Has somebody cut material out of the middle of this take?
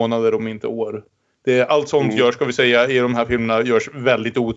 no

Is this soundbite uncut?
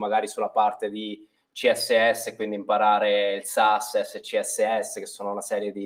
yes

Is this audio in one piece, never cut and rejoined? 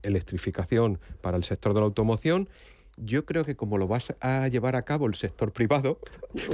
yes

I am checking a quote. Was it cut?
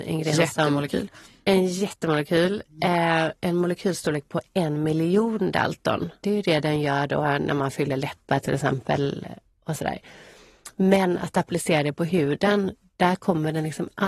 yes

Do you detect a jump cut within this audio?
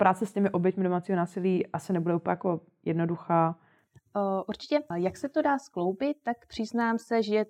yes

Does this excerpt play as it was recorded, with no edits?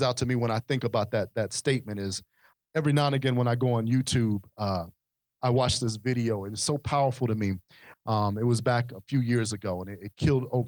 no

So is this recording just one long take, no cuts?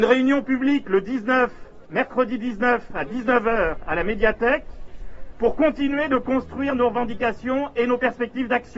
yes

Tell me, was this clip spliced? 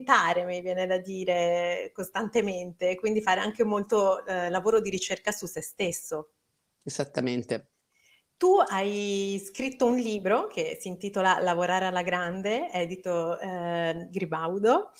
no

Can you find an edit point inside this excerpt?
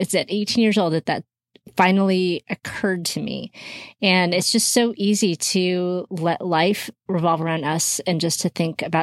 no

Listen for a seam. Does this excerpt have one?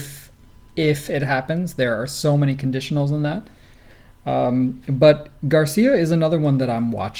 no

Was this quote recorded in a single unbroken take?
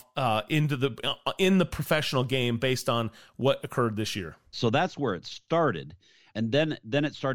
no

